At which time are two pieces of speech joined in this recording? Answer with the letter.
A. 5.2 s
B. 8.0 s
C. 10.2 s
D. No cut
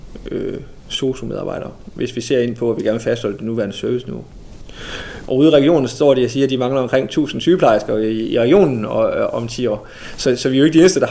A